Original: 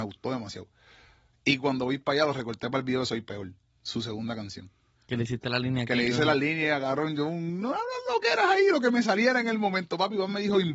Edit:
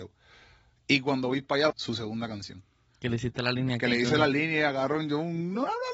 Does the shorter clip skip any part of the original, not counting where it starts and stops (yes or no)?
yes